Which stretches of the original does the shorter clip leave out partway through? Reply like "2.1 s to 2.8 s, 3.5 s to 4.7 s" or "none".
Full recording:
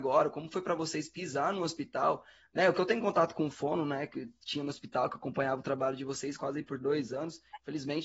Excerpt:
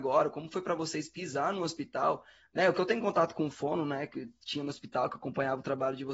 none

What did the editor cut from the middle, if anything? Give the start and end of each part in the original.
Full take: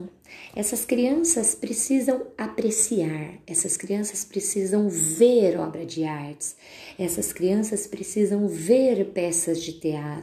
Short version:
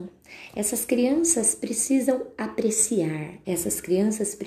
3.4 s to 7.0 s

